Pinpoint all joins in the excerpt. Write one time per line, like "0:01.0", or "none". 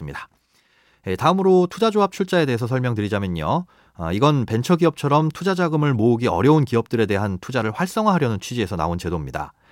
none